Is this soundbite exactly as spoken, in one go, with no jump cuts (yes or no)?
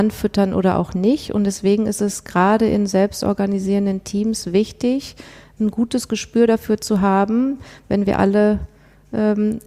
yes